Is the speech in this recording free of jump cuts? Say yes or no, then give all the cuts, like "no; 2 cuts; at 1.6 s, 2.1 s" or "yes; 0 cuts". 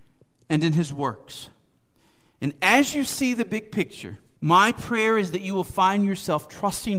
no; 1 cut; at 4.4 s